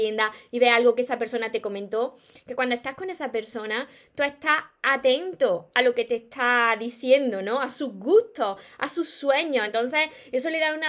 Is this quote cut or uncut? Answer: uncut